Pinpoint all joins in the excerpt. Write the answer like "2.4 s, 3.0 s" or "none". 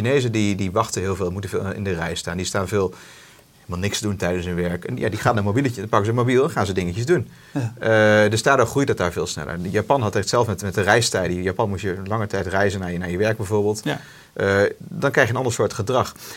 none

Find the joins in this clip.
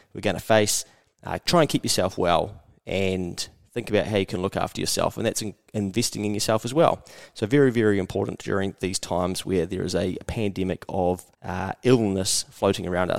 11.3 s

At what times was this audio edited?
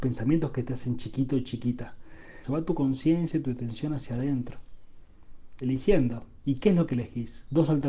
2.4 s, 5.6 s

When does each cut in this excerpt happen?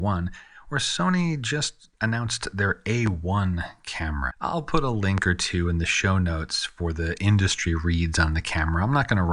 4.3 s

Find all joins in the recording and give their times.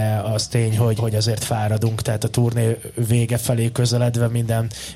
1.0 s

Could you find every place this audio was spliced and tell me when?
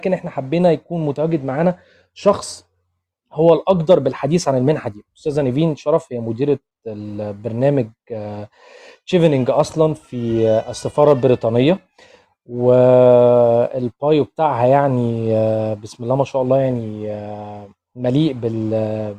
none

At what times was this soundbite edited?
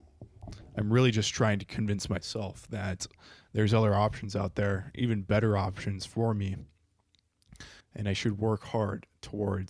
7.8 s

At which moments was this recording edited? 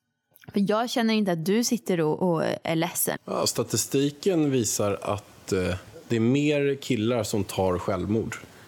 3.2 s

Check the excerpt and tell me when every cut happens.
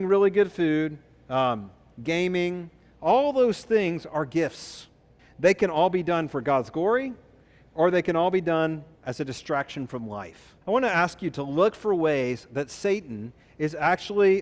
5.2 s, 10.6 s

